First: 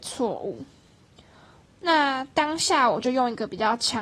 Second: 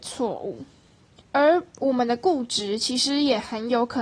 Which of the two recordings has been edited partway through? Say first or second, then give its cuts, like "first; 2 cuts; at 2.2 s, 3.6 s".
second; 1 cut; at 1.2 s